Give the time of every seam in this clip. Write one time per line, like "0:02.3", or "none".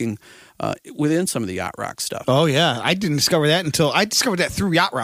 0:02.2